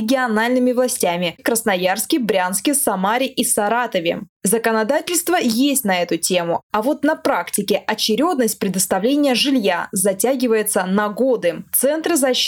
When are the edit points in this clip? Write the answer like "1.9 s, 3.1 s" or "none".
1.4 s, 4.4 s